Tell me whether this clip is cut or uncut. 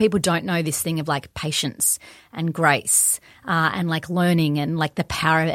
uncut